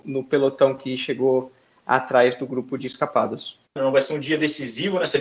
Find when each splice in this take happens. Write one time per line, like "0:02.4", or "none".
0:03.7